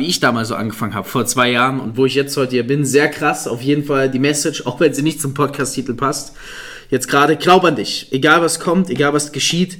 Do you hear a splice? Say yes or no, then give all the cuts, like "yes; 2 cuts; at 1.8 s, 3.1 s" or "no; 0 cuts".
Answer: no; 0 cuts